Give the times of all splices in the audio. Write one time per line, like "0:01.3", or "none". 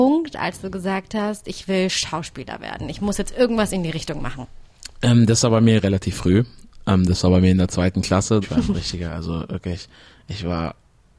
0:08.4